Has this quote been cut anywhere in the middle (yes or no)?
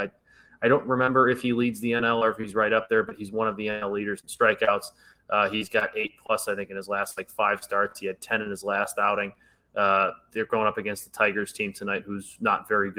no